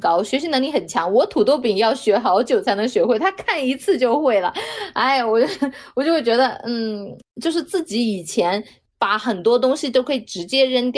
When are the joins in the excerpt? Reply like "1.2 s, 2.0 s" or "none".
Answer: none